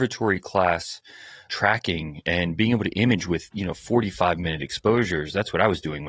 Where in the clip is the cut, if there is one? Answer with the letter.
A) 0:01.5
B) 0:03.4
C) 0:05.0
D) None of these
A